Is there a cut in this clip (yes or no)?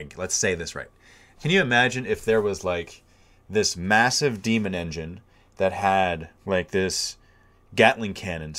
yes